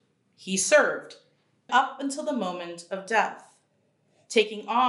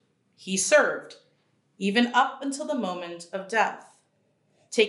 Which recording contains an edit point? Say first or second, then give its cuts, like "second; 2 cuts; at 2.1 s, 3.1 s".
first; 1 cut; at 1.7 s